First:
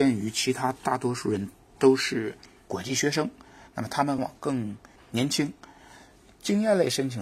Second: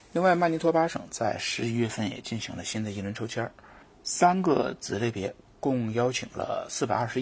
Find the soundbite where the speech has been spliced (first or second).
first